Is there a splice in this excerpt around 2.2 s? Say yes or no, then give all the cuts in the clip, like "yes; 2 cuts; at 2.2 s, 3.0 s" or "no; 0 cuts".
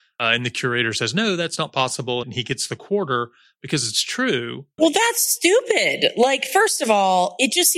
yes; 2 cuts; at 2.2 s, 4.8 s